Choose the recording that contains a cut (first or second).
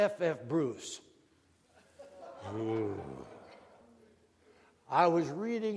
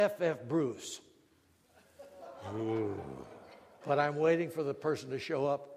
second